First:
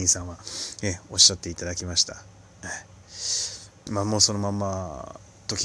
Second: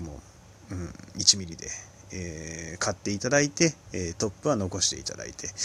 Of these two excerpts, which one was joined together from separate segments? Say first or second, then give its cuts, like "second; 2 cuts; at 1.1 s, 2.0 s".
first; 1 cut; at 3.9 s